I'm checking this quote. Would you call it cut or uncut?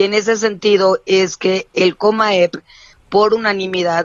uncut